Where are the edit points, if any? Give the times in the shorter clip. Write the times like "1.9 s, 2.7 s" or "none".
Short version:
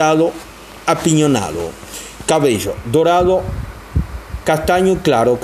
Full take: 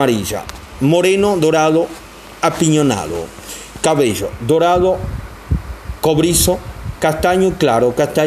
4.4 s